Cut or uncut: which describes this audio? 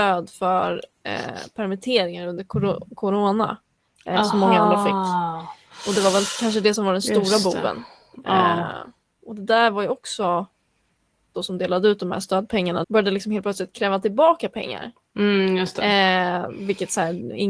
cut